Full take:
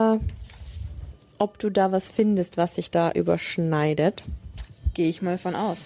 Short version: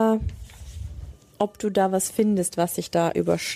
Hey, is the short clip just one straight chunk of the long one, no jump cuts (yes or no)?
yes